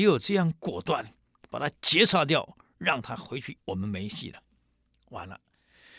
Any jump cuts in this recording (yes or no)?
yes